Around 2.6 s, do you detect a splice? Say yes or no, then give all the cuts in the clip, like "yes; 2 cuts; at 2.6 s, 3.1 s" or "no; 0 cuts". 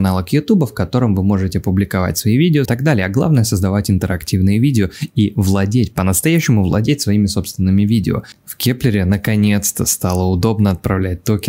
yes; 2 cuts; at 2.6 s, 8.3 s